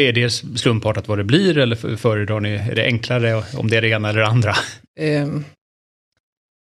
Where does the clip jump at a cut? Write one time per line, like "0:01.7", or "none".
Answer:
0:04.9